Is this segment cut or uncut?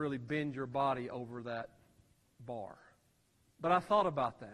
cut